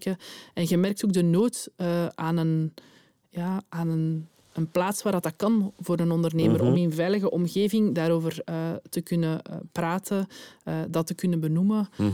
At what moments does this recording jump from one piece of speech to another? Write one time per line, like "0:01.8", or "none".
none